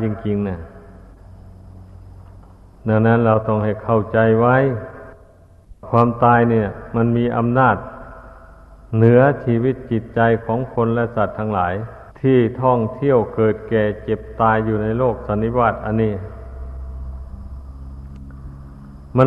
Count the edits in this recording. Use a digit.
1